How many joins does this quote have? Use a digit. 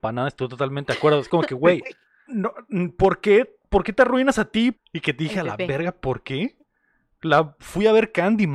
2